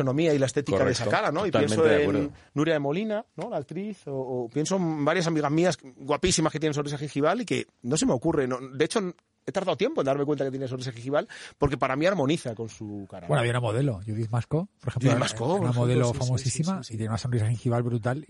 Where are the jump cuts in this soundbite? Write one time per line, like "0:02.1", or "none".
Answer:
none